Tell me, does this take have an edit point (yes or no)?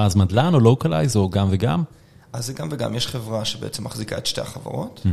no